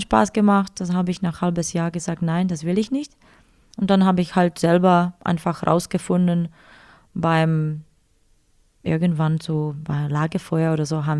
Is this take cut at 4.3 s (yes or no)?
no